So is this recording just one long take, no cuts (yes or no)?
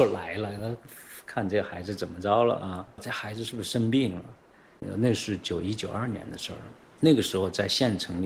yes